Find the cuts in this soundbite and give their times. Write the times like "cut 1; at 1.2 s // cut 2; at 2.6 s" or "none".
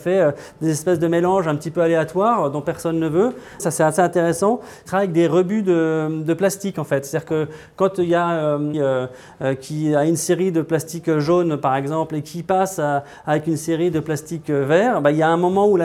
cut 1; at 3.6 s // cut 2; at 8.7 s